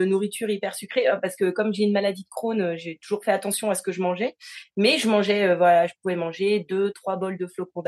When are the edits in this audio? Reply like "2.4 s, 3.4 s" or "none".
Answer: 6.9 s